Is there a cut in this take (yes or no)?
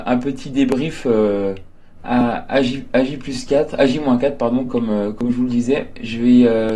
no